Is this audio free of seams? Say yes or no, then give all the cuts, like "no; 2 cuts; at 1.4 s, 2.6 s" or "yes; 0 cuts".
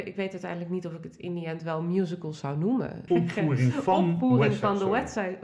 no; 1 cut; at 3.1 s